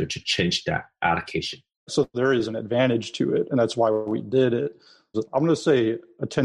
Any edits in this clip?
yes; 2 cuts; at 1.9 s, 5.1 s

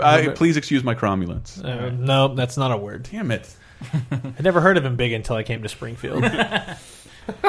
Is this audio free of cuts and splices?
yes; 0 cuts

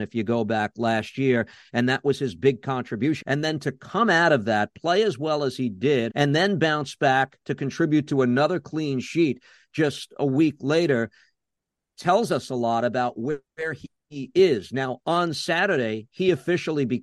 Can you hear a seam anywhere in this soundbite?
yes; 2 cuts; at 3.2 s, 6.1 s

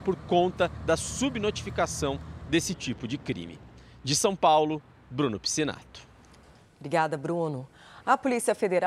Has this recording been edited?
no; 0 cuts

